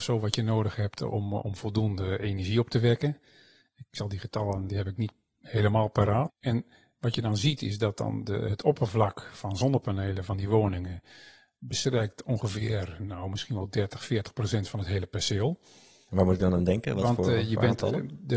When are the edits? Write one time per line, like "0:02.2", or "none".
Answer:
0:04.7
0:06.3
0:16.1